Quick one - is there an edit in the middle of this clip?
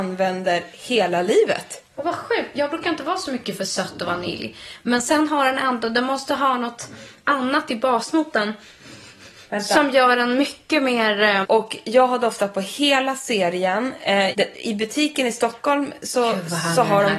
yes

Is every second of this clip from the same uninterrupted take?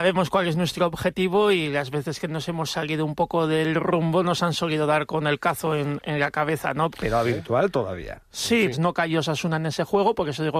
no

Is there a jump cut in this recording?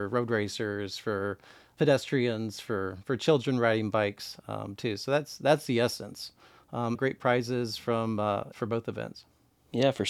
yes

